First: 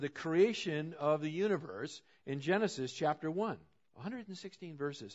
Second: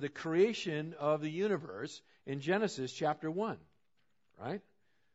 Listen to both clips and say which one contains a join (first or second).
first